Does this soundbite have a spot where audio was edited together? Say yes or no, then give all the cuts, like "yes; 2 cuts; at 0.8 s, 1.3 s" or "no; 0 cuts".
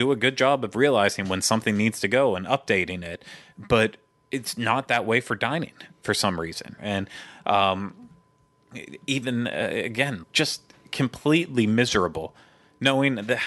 yes; 2 cuts; at 6.8 s, 10.2 s